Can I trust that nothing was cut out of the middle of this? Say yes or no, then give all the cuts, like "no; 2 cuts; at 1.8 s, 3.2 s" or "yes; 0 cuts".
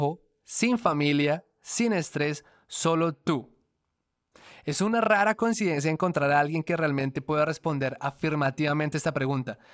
yes; 0 cuts